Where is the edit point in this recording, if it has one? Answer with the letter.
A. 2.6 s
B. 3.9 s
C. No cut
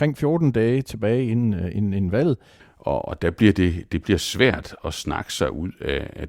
A